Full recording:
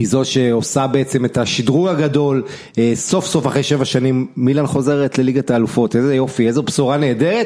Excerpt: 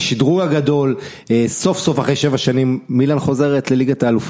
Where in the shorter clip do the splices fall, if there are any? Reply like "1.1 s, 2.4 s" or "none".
none